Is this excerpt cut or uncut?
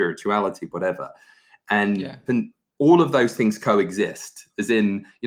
cut